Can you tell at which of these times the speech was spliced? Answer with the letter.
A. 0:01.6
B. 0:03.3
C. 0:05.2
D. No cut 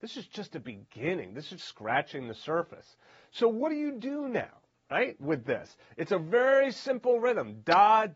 A